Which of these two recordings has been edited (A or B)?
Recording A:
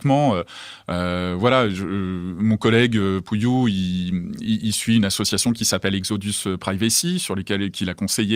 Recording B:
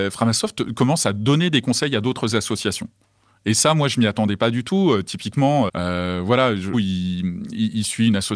B